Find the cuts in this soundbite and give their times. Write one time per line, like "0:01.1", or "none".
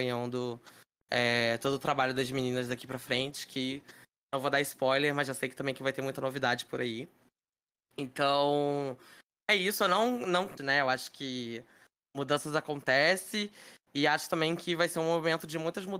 0:10.6